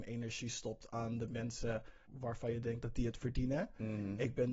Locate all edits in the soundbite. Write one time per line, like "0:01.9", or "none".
0:02.1